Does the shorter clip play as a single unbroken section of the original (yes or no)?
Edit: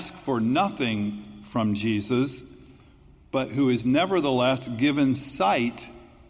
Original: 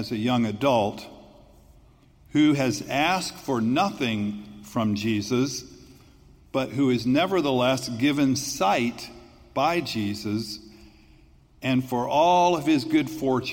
yes